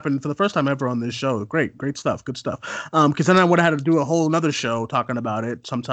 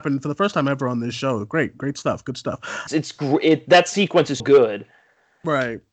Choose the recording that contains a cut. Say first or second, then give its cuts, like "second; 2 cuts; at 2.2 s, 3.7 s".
second; 2 cuts; at 2.9 s, 4.4 s